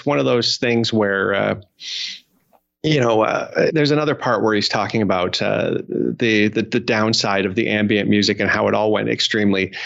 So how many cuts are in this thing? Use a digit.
1